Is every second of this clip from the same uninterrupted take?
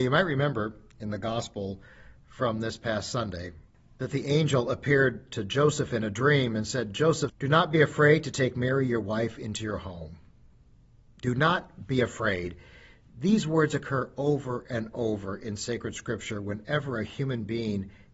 no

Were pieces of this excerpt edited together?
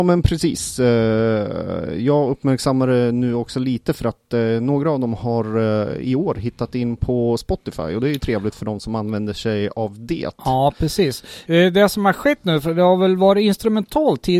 no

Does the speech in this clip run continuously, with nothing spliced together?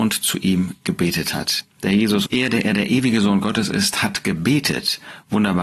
no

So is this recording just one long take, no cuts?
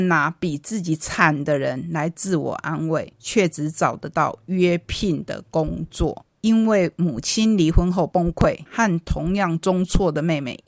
no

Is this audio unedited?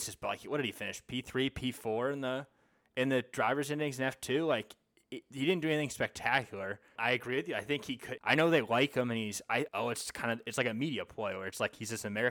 no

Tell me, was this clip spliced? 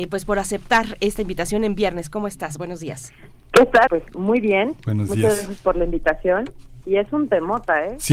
yes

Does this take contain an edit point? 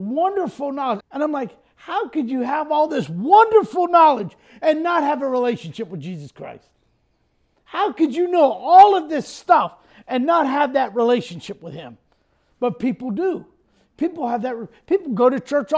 yes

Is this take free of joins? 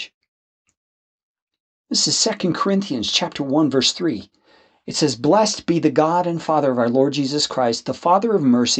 yes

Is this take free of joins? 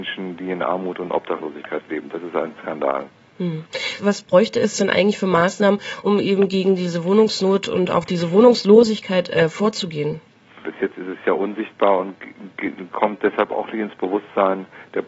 no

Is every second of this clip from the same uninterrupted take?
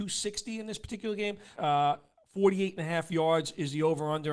no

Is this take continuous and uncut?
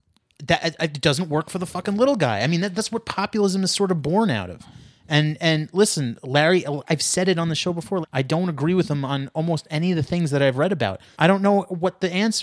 no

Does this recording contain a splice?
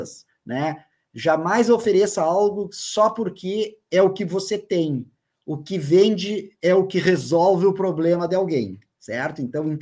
no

